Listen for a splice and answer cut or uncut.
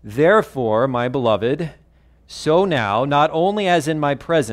cut